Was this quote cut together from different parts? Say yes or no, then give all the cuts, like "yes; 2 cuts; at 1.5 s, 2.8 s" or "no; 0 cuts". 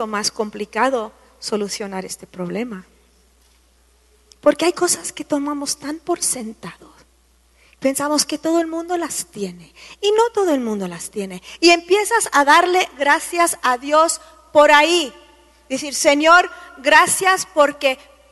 no; 0 cuts